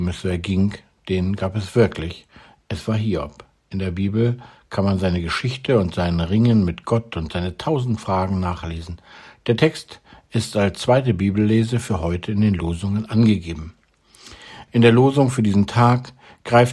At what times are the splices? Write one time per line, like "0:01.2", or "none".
0:14.7